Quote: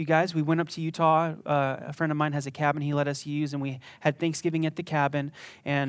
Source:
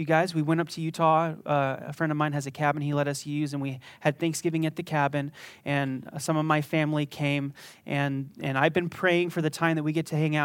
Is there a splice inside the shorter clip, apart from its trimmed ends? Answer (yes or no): no